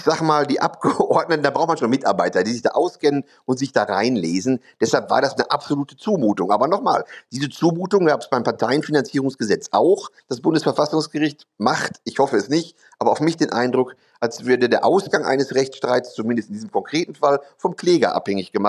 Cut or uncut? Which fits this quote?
cut